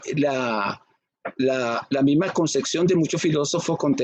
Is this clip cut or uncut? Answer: uncut